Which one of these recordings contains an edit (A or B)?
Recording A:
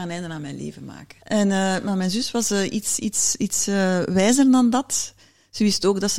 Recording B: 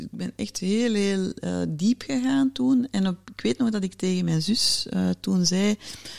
A